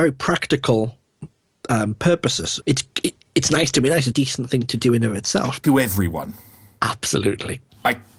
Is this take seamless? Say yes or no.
no